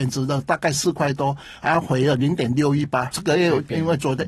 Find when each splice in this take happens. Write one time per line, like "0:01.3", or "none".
0:03.1